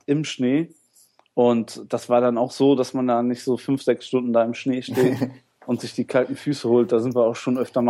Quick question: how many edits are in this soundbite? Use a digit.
0